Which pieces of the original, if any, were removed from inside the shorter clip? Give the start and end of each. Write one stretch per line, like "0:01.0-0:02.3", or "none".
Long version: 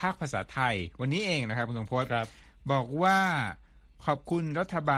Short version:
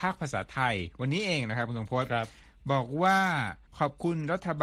0:03.7-0:03.9